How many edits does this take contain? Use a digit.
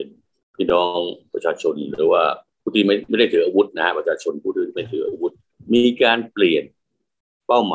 0